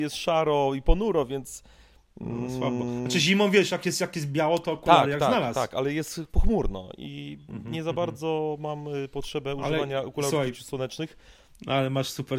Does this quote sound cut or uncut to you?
cut